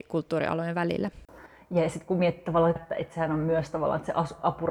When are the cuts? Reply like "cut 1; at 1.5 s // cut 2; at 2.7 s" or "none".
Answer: cut 1; at 2.8 s